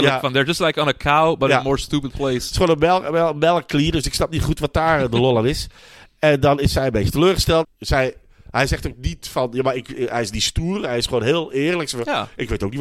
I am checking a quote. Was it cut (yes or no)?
yes